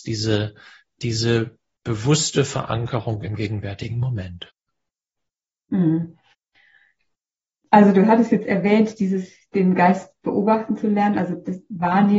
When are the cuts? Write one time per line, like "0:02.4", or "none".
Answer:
none